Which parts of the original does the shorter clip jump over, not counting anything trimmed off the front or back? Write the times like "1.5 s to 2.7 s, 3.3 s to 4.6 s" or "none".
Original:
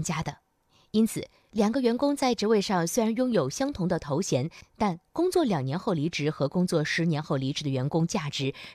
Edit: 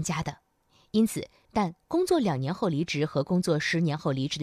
1.4 s to 4.7 s